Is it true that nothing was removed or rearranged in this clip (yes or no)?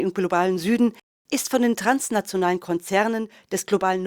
yes